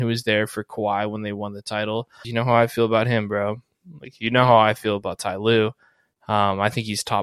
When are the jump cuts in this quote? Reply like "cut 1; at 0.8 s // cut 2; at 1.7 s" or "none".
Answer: cut 1; at 2.2 s